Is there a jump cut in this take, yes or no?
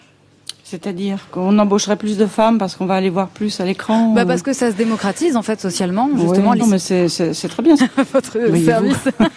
yes